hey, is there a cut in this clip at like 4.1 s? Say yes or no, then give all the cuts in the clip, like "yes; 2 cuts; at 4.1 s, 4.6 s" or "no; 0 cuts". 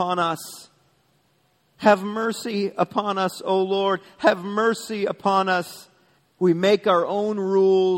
no; 1 cut; at 6.2 s